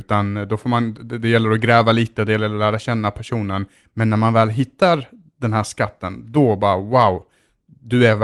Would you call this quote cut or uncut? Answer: uncut